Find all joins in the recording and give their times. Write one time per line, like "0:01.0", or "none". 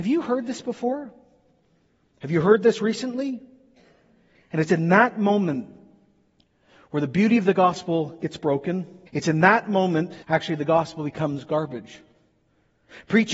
0:09.1
0:10.2